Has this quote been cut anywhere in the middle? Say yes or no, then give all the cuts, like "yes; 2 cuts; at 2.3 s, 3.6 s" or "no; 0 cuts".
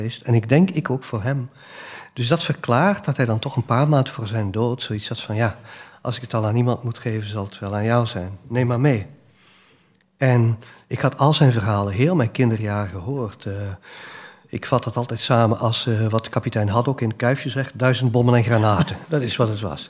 no; 0 cuts